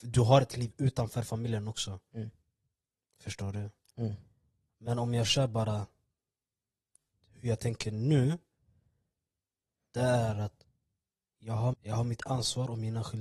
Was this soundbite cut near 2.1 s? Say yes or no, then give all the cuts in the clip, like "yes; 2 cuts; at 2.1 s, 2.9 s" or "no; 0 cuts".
no; 2 cuts; at 3.9 s, 11.7 s